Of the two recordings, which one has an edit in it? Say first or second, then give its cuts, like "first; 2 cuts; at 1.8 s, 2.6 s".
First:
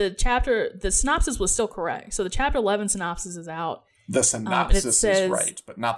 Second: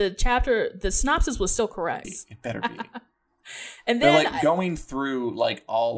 second; 1 cut; at 2.0 s